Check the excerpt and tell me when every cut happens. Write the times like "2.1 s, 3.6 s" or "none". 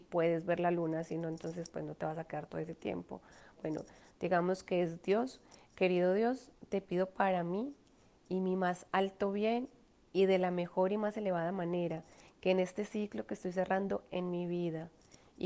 3.6 s